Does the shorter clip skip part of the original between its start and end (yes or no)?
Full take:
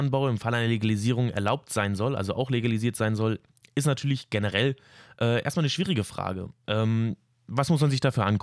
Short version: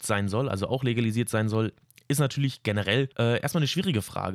yes